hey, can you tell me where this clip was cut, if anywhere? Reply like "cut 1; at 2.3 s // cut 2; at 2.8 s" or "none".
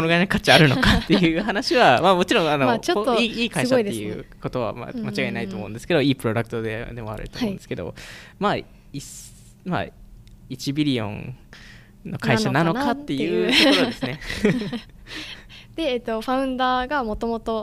none